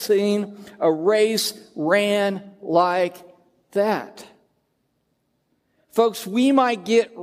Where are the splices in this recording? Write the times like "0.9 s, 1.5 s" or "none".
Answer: none